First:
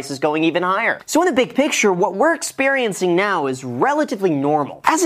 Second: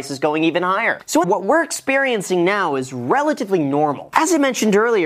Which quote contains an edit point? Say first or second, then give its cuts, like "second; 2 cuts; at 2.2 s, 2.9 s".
second; 1 cut; at 1.2 s